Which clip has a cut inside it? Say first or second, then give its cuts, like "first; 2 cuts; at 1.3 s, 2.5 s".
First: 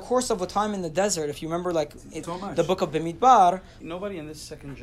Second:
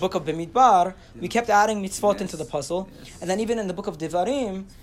first; 2 cuts; at 2.2 s, 3.8 s